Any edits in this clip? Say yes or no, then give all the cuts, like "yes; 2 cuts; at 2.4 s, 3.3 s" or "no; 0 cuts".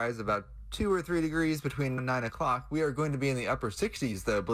yes; 1 cut; at 2.0 s